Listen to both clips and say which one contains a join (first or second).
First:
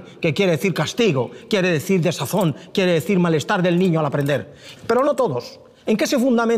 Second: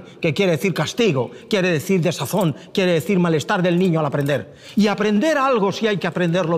first